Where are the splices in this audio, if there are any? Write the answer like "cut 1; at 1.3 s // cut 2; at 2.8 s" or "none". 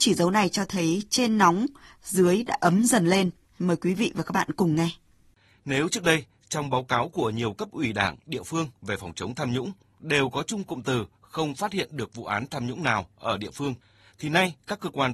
cut 1; at 3.4 s

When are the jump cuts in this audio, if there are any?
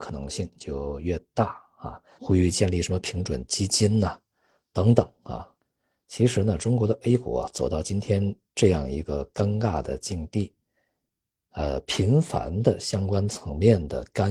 cut 1; at 2.1 s

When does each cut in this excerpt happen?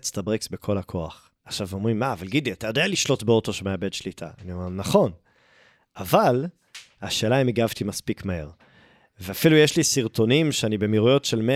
cut 1; at 1.4 s

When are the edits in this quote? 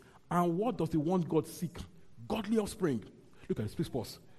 none

